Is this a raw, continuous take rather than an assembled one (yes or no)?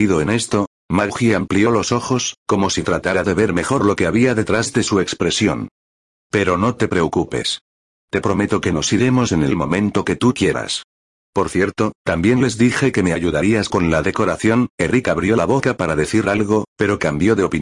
yes